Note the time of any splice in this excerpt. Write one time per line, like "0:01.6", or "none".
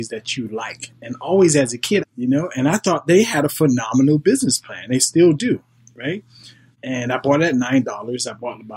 0:02.0